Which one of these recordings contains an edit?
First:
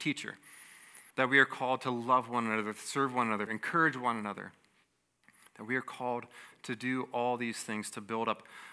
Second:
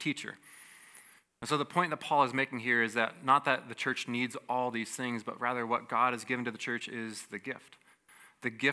first; 2 cuts; at 1.1 s, 3.5 s

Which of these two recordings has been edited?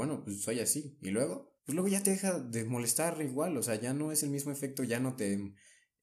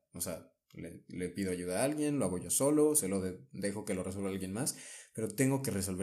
first; 1 cut; at 1.6 s

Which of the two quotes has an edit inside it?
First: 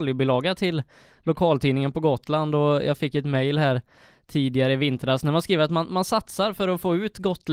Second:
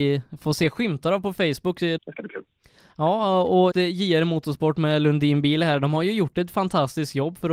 second; 2 cuts; at 2.0 s, 3.7 s

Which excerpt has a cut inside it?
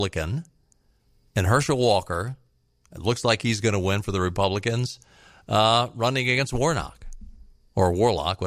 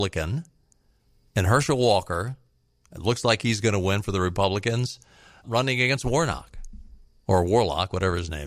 second; 1 cut; at 5.4 s

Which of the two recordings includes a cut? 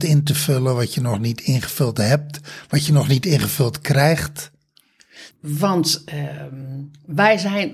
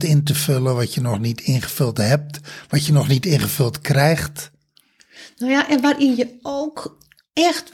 first; 1 cut; at 5.3 s

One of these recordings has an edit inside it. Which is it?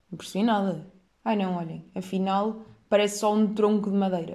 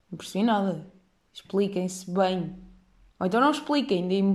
first; 1 cut; at 1.1 s

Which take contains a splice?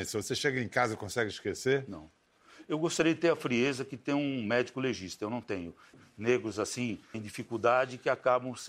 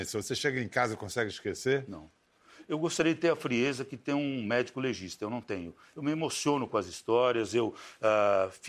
first; 2 cuts; at 5.9 s, 7.1 s

